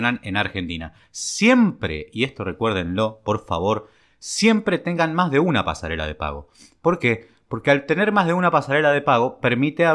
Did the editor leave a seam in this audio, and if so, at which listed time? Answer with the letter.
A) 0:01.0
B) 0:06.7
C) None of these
C